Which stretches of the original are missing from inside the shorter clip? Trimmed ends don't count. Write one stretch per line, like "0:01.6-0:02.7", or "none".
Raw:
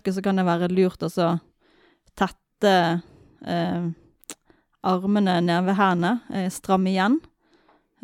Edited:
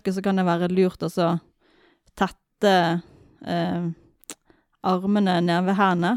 none